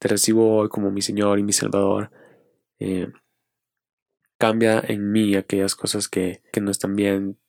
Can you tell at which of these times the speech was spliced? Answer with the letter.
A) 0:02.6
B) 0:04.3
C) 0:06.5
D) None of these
C